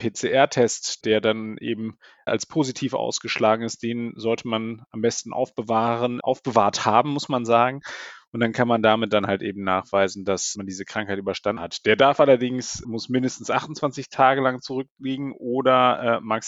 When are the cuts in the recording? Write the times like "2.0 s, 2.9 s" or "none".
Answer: 6.2 s